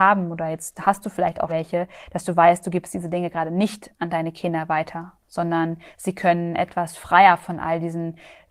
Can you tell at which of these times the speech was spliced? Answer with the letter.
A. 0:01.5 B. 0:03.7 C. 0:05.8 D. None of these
A